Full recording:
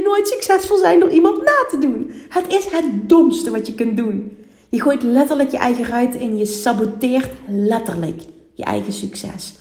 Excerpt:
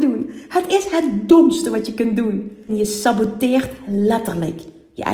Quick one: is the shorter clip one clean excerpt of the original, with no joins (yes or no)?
no